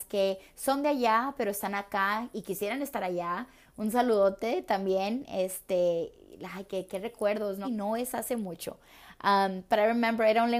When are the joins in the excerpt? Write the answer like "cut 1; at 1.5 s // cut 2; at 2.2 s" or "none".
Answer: cut 1; at 7.6 s